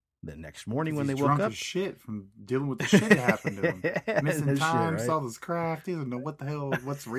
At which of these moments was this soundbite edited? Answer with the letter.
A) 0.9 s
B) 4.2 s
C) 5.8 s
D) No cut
D